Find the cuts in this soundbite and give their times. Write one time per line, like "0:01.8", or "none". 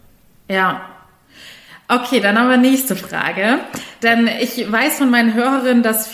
none